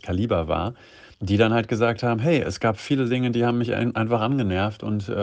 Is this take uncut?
no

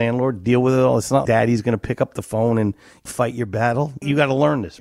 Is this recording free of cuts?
no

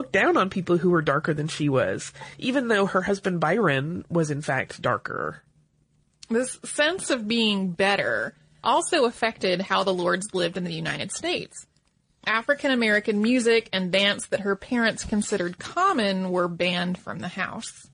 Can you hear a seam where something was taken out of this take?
yes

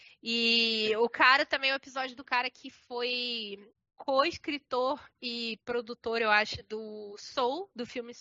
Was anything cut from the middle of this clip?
no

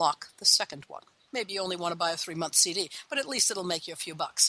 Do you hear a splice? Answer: yes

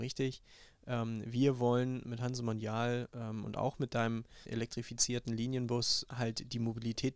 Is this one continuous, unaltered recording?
no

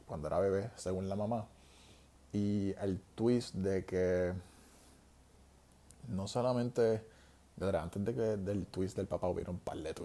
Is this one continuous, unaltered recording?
yes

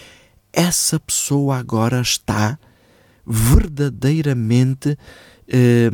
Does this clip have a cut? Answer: no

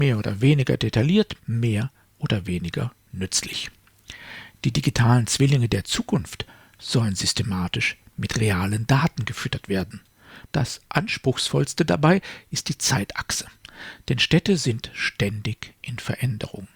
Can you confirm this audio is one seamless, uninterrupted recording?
no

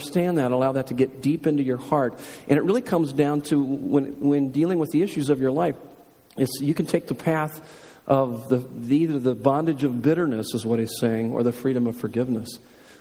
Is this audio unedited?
yes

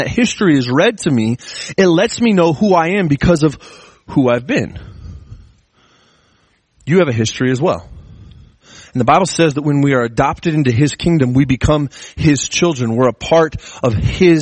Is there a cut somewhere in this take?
no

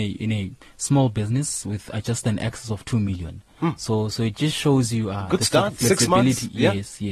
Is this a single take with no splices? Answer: yes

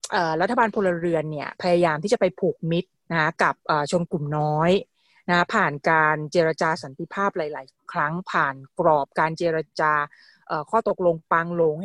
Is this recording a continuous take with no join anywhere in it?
no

